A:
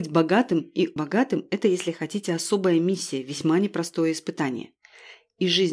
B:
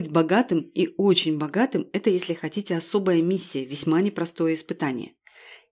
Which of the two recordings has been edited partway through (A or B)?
A